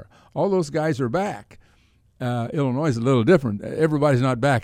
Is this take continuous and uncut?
yes; 0 cuts

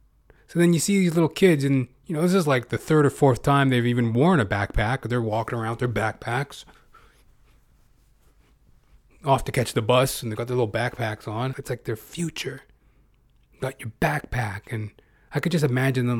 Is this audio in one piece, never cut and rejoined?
no; 1 cut; at 11.5 s

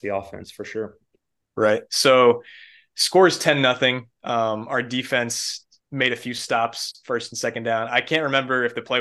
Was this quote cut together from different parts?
no; 0 cuts

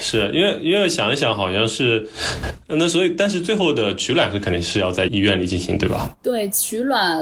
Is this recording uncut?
no; 1 cut; at 5.1 s

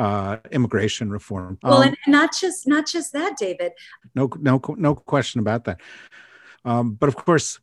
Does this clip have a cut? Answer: yes; 3 cuts; at 1.6 s, 4.0 s, 6.5 s

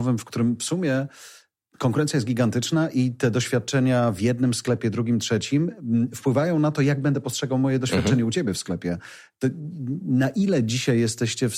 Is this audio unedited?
yes; 0 cuts

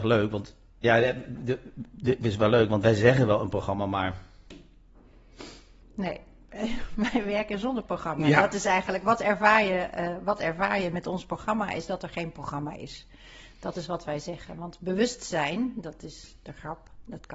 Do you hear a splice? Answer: no; 0 cuts

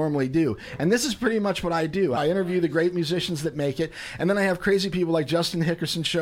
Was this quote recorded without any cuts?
no; 1 cut; at 2.2 s

